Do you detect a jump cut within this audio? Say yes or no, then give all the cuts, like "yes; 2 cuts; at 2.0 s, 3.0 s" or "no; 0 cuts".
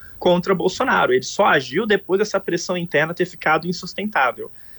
no; 0 cuts